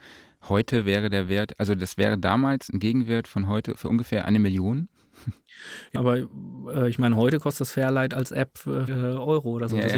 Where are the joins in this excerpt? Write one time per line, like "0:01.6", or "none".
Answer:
0:06.0
0:08.9